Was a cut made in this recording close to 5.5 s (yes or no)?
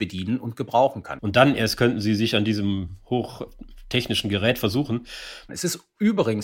yes